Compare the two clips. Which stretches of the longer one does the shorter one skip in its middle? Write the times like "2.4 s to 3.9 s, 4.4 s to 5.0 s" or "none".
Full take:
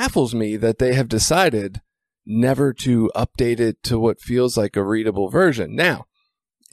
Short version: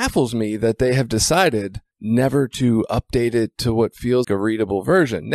1.9 s to 2.2 s, 4.5 s to 4.7 s